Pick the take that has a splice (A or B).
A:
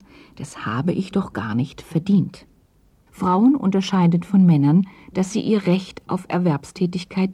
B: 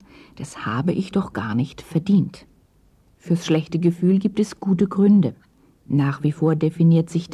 A